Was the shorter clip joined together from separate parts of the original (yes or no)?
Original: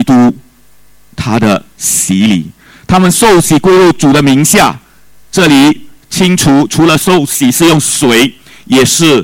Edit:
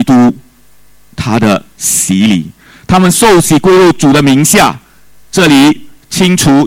no